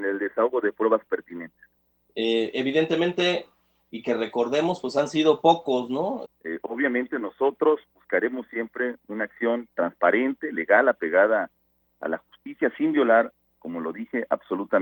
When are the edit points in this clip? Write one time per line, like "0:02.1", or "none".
0:02.1
0:06.3